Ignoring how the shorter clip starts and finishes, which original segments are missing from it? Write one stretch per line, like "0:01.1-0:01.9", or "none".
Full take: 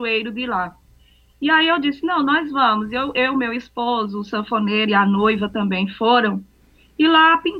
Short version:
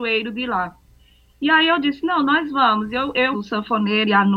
0:03.3-0:04.1